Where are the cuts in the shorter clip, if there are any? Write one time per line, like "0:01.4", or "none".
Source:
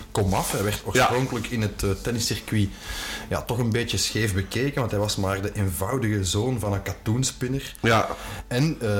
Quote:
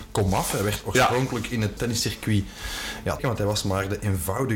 0:01.8
0:03.2